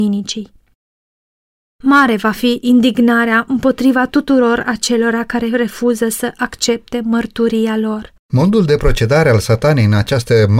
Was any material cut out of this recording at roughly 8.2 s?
yes; 1 cut; at 8.2 s

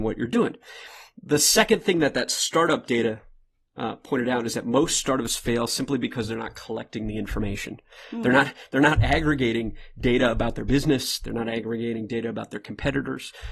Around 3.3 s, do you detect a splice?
no; 0 cuts

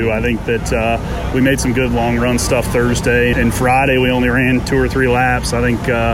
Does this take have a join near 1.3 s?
no; 1 cut; at 3.3 s

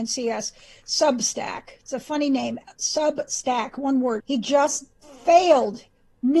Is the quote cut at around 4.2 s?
yes; 1 cut; at 4.2 s

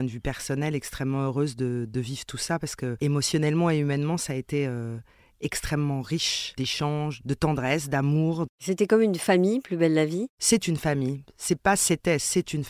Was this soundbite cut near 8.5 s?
yes; 1 cut; at 8.5 s

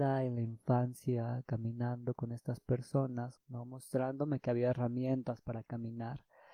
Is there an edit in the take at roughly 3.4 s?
yes; 1 cut; at 3.4 s

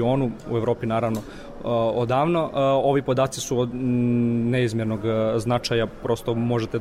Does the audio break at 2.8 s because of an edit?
no; 0 cuts

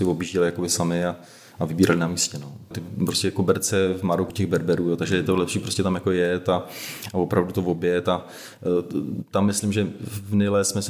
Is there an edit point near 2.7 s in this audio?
yes; 2 cuts; at 2.7 s, 4.3 s

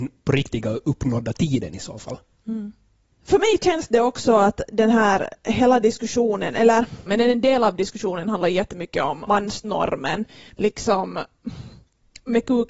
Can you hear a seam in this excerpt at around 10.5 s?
yes; 2 cuts; at 7.1 s, 10.5 s

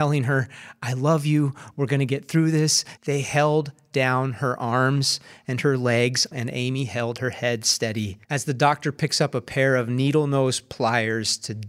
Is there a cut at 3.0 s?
yes; 3 cuts; at 3.0 s, 6.3 s, 8.2 s

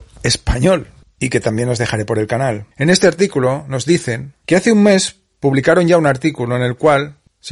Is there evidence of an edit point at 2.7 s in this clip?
yes; 1 cut; at 2.7 s

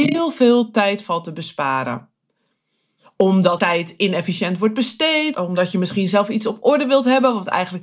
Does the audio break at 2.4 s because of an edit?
no; 2 cuts; at 3.6 s, 5.3 s

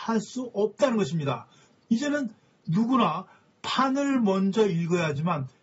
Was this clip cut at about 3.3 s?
no; 1 cut; at 1.8 s

